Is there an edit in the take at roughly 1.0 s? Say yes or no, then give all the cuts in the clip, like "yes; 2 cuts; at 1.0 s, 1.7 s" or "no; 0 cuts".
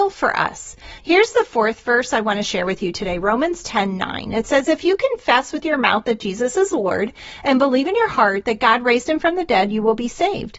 yes; 1 cut; at 1.0 s